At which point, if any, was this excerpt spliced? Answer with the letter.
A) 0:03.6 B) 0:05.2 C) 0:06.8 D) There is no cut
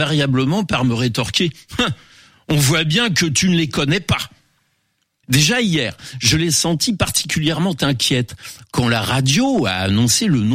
B